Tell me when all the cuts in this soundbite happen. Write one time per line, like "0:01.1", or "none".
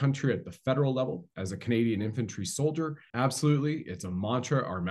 0:03.1